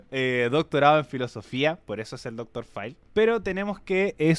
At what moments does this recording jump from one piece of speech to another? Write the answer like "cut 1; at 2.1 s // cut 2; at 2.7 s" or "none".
cut 1; at 3.1 s